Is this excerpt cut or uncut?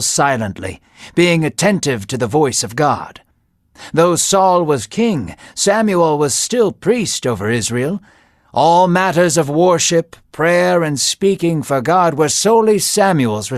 uncut